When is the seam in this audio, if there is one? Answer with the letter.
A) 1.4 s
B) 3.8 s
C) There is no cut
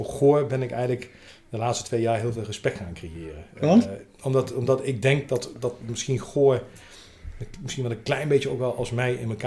C